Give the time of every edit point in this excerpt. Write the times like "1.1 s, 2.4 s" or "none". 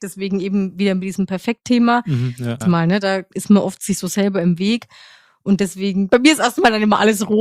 2.6 s